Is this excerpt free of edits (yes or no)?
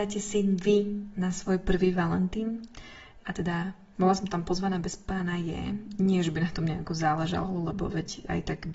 no